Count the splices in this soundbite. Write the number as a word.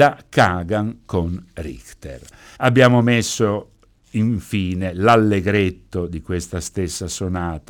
one